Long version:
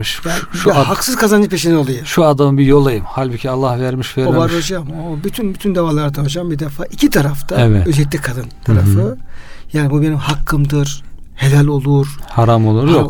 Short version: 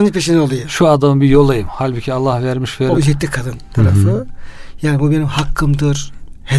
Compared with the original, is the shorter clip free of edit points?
no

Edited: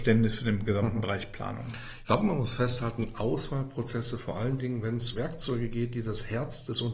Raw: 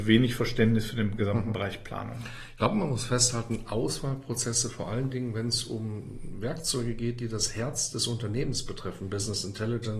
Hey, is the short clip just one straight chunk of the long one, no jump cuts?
no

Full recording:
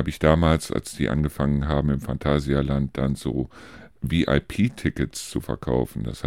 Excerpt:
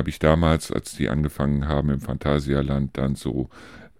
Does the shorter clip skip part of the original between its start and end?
no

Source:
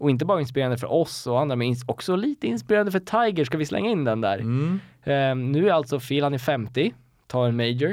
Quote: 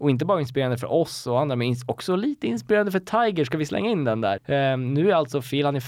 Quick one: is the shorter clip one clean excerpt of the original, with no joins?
no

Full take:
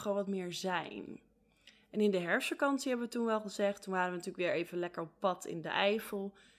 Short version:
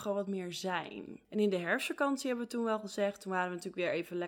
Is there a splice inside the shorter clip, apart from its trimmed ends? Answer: yes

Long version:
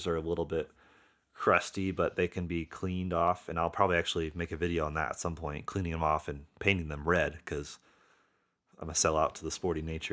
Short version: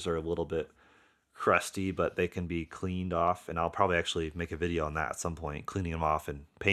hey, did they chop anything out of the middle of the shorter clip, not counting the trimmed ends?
no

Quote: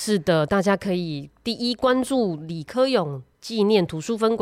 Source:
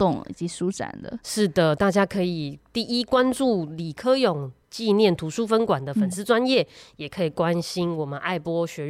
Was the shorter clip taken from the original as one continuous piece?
yes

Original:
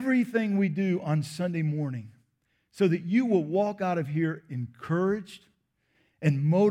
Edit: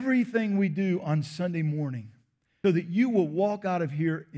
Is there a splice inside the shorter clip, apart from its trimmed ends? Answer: yes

